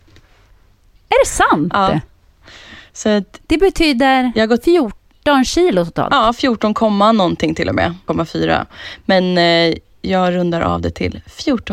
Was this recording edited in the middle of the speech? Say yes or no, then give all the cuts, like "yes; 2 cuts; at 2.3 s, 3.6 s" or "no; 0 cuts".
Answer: yes; 1 cut; at 8.1 s